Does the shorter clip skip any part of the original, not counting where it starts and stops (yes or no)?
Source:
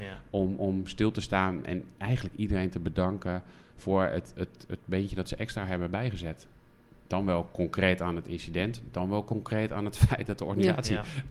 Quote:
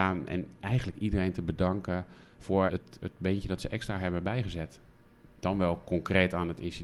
yes